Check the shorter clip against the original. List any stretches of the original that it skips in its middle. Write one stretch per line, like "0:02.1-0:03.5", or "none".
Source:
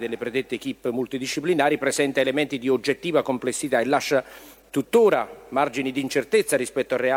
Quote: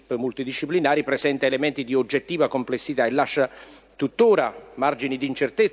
none